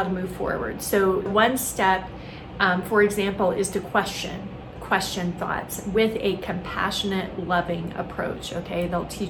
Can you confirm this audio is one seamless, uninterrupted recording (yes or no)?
no